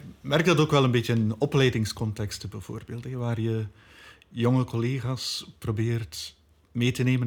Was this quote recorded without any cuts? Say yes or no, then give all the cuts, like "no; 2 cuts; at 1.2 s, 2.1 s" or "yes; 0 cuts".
yes; 0 cuts